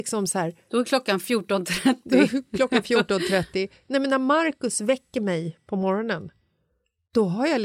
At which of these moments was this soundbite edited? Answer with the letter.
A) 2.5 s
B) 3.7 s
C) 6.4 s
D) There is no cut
D